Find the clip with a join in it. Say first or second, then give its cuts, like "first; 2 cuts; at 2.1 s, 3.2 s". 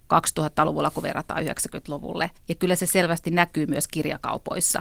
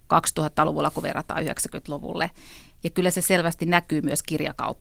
first; 1 cut; at 2.4 s